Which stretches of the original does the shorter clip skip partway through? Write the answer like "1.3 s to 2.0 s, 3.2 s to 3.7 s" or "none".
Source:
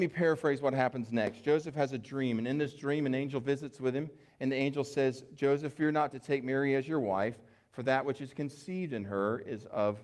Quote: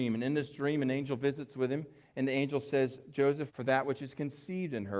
5.7 s to 7.7 s